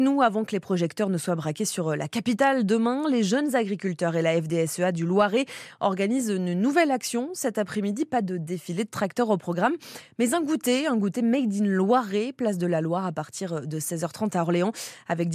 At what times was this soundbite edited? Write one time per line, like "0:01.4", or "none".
none